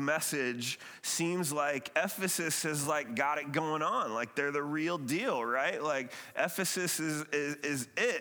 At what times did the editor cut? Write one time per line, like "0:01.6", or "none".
none